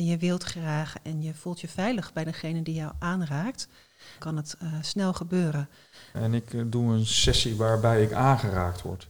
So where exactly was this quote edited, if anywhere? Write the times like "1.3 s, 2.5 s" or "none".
4.2 s, 6.1 s